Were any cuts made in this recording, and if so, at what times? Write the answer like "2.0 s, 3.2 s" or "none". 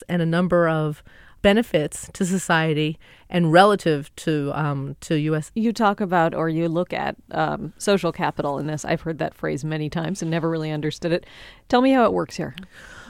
5.5 s

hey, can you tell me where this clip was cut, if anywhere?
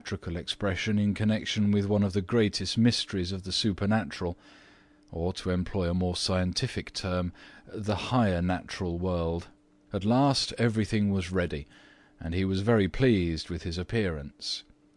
9.9 s

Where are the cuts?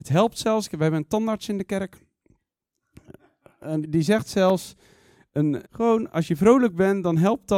3.8 s, 5.6 s

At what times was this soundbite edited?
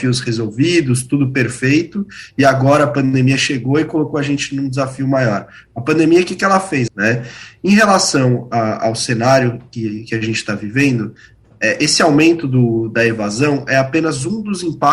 6.9 s

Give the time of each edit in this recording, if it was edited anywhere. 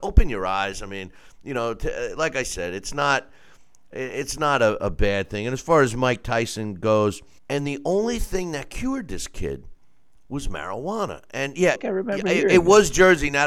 7.4 s, 11.7 s

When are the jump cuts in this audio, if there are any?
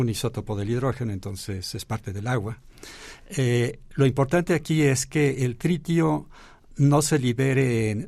6.7 s

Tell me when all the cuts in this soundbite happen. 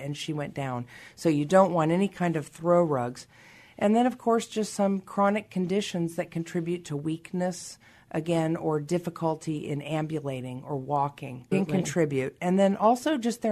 11.5 s

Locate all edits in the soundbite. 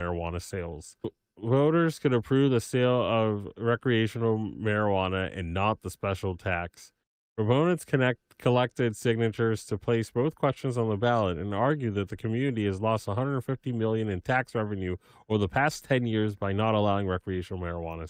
none

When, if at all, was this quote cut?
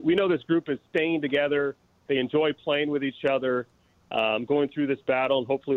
none

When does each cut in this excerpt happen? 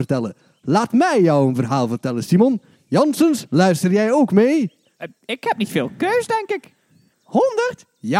7.1 s

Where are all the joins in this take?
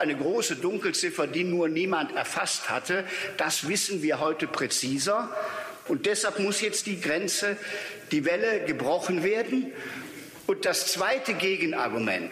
5.9 s

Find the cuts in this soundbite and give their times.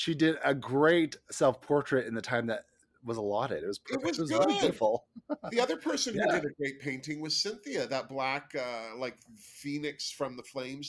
none

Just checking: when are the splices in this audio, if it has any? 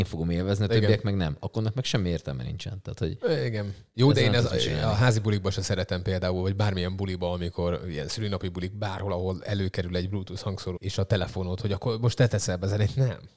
3.9 s, 10.8 s

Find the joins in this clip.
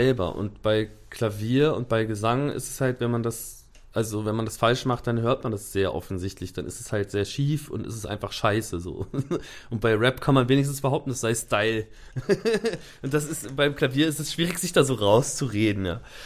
none

